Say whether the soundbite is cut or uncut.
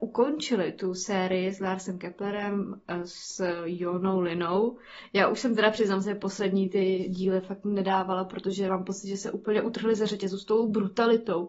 uncut